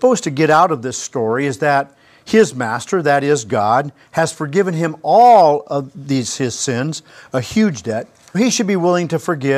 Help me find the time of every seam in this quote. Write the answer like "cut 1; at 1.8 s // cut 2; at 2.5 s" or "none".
cut 1; at 8.3 s